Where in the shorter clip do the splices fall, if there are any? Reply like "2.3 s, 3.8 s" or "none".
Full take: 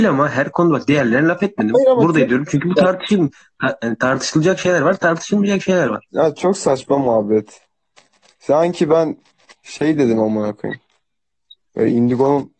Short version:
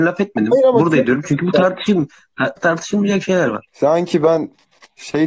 2.6 s, 3.7 s